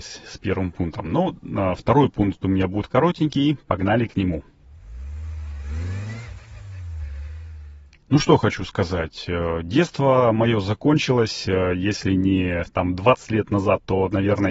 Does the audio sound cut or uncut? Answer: uncut